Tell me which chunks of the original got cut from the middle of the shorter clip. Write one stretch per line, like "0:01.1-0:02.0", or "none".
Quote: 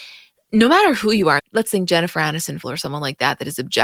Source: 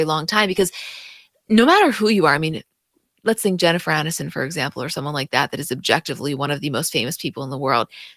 0:02.4-0:03.1
0:04.3-0:04.7